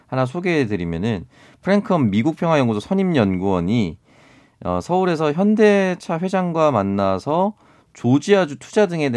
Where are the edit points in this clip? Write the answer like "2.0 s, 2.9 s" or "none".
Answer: none

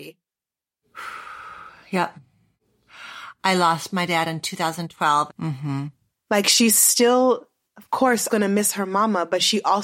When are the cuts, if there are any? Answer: 5.3 s, 8.3 s

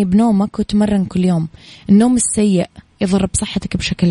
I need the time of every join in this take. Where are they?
none

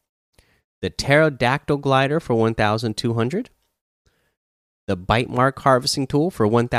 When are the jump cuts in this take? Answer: none

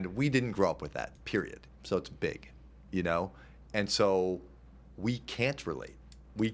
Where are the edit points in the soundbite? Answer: 1.7 s

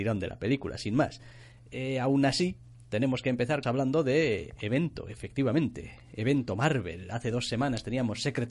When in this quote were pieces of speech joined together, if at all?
3.6 s

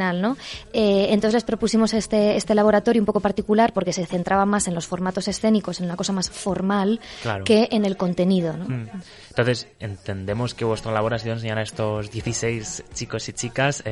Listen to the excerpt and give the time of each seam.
none

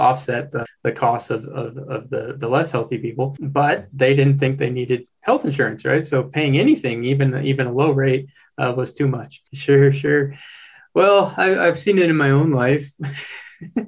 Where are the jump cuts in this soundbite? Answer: 9.5 s

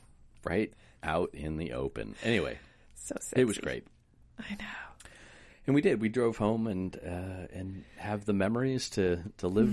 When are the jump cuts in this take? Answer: none

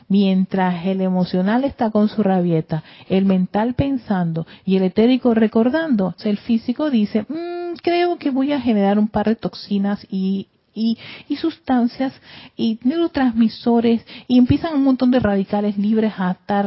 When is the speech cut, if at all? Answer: 6.2 s

